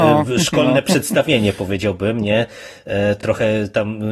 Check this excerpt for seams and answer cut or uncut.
uncut